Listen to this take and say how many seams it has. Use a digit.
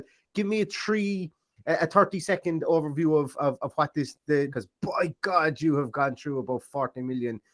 1